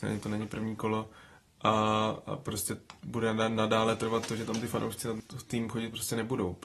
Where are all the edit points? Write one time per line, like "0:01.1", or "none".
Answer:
none